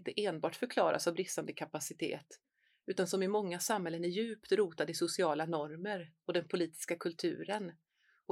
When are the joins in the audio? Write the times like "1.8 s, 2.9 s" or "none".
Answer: none